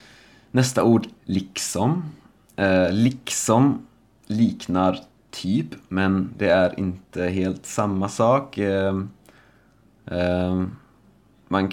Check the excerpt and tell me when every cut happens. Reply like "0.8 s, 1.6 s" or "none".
none